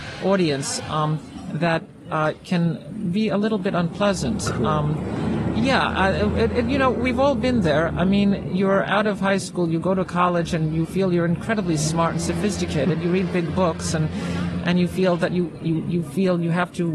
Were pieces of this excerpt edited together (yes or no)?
no